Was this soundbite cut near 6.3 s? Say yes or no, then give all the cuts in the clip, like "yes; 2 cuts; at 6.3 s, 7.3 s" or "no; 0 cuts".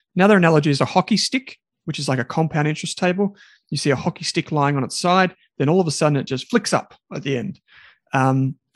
no; 0 cuts